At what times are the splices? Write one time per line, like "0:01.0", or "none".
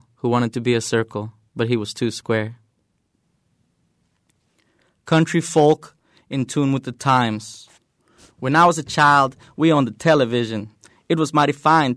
none